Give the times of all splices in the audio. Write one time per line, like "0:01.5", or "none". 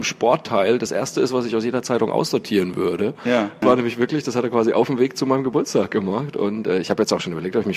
0:03.6